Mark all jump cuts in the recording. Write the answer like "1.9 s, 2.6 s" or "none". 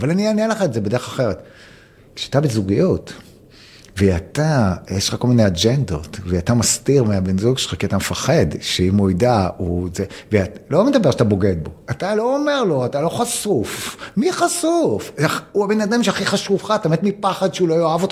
none